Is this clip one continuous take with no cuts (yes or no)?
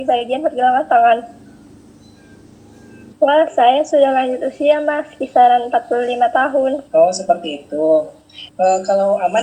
no